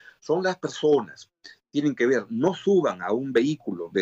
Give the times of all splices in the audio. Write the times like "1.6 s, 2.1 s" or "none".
none